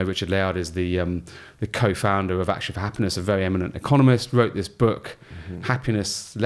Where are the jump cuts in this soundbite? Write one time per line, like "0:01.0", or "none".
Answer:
none